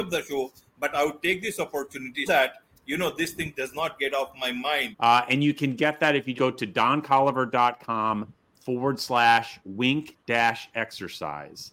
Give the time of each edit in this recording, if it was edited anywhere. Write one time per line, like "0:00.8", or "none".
0:02.3
0:04.9
0:06.4